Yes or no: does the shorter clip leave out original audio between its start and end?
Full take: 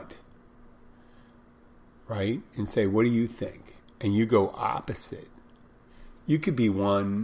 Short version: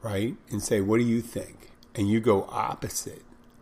no